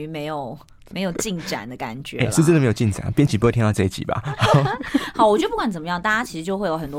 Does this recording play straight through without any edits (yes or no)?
yes